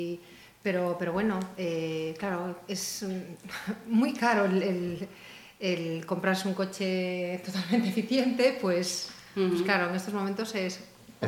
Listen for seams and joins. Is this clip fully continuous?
yes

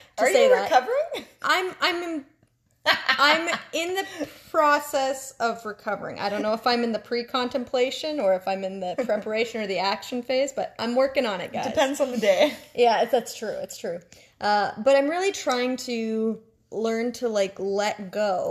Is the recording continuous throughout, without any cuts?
yes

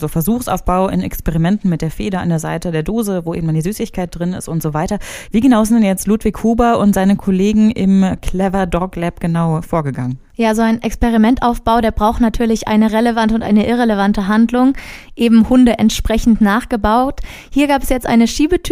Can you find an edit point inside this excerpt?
yes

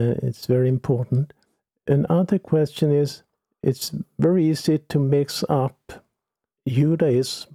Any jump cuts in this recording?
no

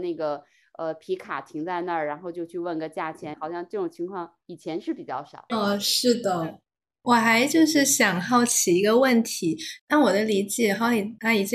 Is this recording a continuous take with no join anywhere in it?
no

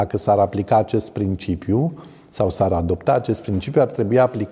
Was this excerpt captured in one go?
yes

